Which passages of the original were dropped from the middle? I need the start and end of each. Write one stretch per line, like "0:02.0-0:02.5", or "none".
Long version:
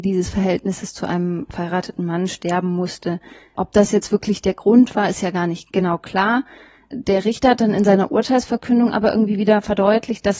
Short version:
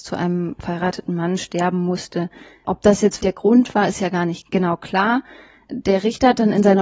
0:04.1-0:04.4